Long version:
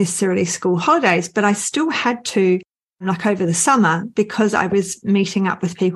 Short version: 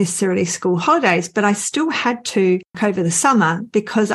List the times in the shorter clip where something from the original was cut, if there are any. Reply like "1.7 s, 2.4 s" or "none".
2.7 s